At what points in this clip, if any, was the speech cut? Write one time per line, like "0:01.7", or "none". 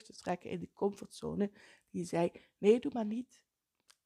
none